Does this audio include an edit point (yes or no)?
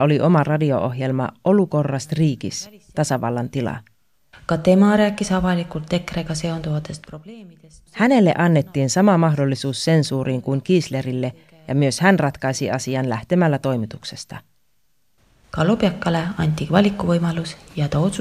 yes